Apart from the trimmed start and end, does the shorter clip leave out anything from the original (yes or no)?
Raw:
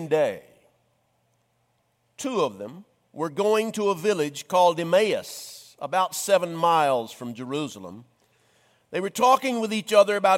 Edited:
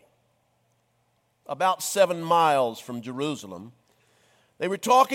yes